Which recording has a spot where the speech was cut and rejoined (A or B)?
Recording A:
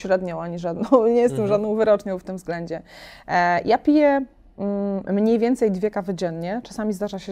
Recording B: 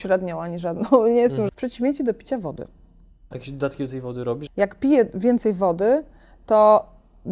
B